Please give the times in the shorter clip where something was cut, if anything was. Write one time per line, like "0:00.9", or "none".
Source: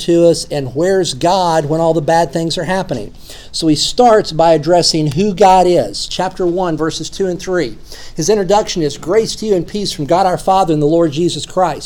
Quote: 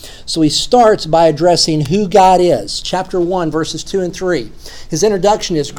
none